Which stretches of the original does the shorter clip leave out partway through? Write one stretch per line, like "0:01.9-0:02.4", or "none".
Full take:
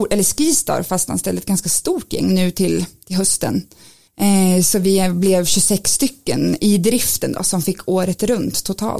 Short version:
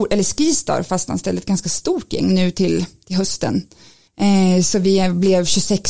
none